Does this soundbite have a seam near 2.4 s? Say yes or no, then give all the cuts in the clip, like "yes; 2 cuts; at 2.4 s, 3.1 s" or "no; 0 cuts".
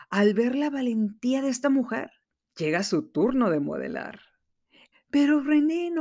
yes; 2 cuts; at 2.4 s, 4.9 s